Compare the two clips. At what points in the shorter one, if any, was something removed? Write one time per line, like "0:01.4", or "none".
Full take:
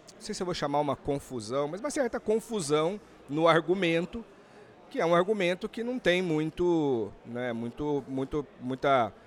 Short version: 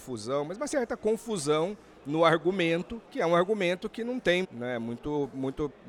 0:03.0
0:04.4